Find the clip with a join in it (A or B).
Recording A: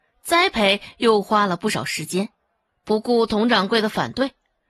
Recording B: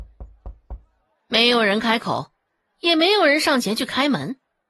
A